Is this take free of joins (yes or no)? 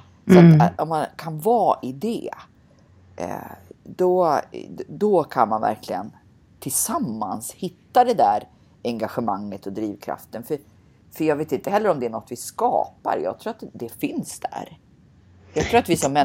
yes